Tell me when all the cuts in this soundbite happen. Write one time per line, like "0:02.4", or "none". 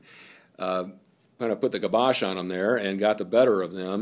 none